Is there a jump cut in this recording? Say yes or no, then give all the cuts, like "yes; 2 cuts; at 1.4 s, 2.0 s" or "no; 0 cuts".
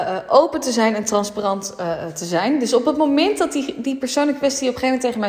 no; 0 cuts